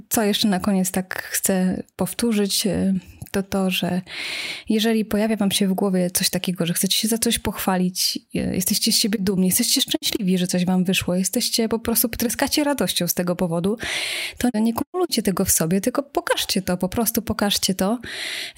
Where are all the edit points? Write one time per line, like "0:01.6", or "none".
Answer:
0:14.5